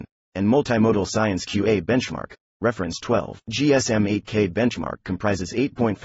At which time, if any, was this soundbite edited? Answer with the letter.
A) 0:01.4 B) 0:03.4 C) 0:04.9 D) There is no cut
B